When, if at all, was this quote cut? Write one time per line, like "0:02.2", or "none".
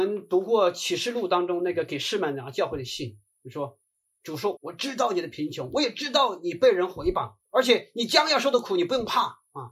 0:04.6
0:07.5